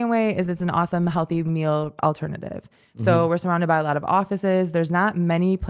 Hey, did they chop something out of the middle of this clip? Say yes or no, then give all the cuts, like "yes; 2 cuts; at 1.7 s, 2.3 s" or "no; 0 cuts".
no; 0 cuts